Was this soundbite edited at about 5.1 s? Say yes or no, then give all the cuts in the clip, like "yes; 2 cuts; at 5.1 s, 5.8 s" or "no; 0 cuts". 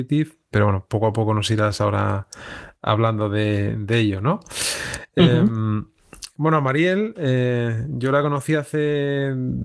no; 0 cuts